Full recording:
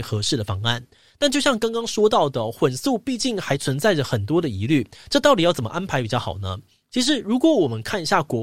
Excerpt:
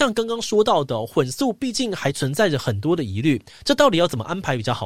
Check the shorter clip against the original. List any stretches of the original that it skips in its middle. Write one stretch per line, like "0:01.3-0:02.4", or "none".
none